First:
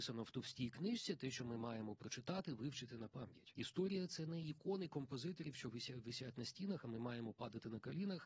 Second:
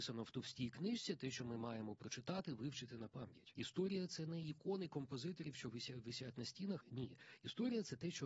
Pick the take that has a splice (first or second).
second